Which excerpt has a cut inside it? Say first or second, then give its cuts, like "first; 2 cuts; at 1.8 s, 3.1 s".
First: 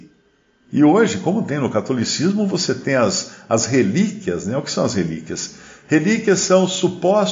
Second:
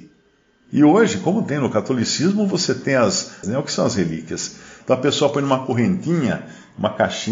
second; 2 cuts; at 3.4 s, 4.8 s